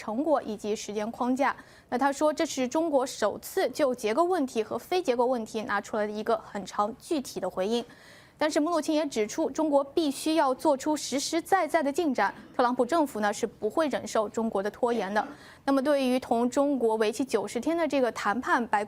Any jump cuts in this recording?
no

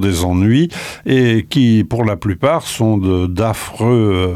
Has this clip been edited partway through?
no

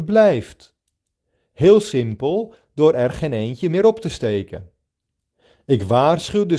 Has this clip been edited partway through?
no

